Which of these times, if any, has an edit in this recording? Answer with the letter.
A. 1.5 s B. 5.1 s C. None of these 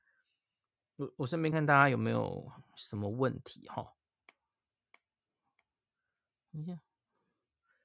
A